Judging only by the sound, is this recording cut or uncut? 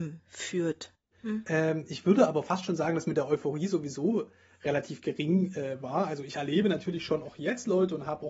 cut